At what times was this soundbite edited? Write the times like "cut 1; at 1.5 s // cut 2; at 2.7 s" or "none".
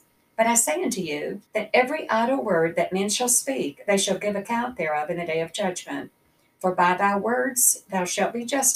cut 1; at 1.5 s